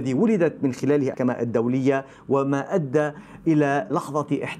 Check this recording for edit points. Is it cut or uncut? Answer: cut